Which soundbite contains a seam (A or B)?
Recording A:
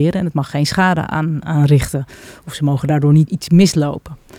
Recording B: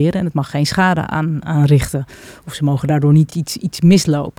A